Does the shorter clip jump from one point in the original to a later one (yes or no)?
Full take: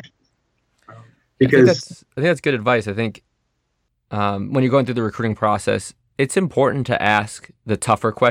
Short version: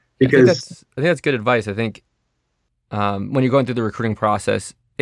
no